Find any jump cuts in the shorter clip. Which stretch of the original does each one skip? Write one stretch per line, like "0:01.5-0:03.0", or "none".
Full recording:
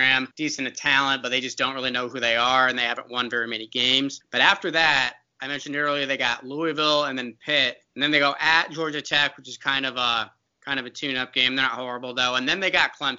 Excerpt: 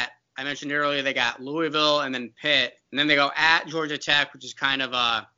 none